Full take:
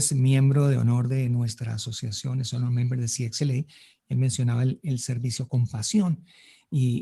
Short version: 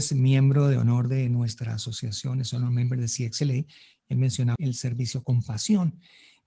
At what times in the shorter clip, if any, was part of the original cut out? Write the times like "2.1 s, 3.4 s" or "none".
4.6 s